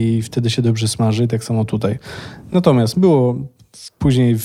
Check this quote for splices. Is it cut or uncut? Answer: uncut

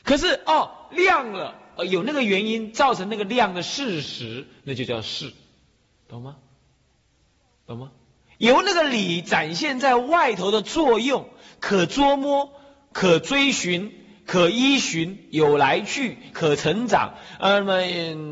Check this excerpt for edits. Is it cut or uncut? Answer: uncut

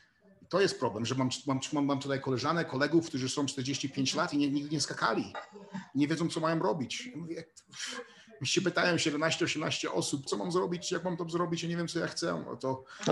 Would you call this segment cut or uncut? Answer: cut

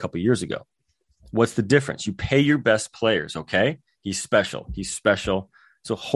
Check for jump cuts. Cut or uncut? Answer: uncut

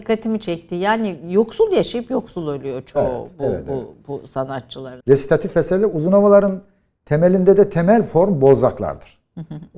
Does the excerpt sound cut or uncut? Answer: cut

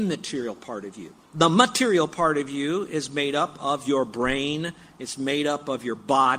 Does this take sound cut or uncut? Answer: cut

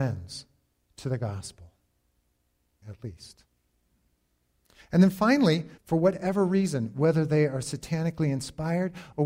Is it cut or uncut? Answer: cut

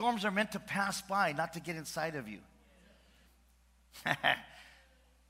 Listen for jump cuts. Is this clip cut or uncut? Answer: cut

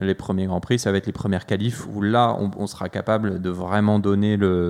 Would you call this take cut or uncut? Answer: uncut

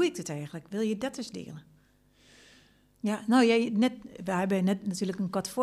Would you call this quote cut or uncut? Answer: cut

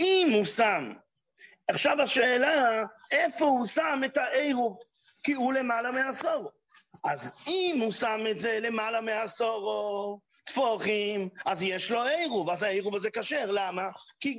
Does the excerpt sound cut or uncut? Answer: cut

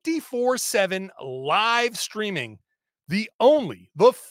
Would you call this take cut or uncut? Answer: uncut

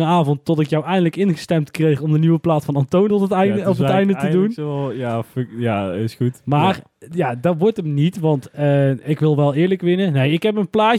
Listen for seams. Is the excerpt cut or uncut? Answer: uncut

